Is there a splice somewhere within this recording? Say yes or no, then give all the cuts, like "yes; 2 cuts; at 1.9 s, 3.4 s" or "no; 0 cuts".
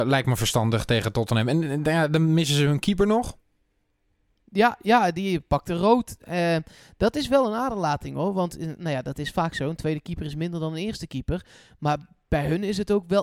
no; 0 cuts